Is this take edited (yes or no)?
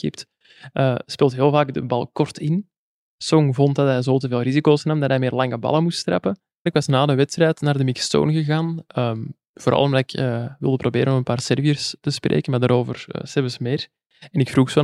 yes